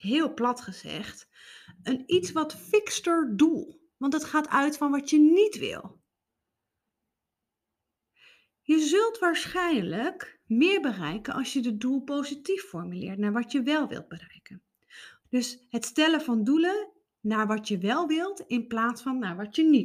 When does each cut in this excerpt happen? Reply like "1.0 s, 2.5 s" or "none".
15.2 s